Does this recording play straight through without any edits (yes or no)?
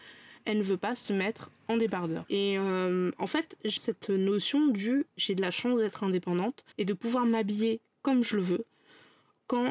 no